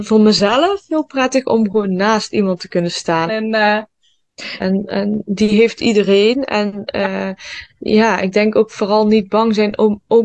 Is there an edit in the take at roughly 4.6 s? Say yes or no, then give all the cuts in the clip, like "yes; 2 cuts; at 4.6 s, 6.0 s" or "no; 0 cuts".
yes; 2 cuts; at 3.3 s, 4.6 s